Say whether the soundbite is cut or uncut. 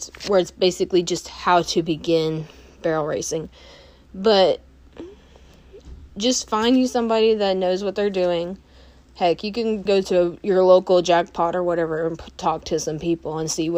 cut